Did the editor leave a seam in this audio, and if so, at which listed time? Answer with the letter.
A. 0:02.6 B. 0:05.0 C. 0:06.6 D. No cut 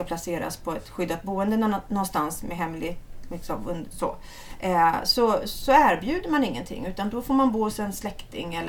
D